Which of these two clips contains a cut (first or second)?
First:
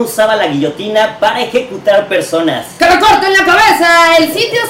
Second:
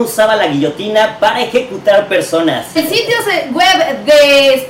second